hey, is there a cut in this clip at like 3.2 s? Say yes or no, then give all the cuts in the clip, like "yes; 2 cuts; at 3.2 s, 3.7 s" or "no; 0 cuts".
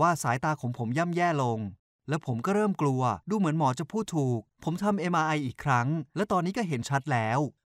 yes; 2 cuts; at 3.2 s, 4.5 s